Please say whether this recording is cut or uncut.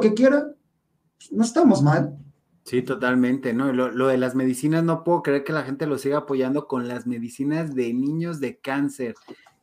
uncut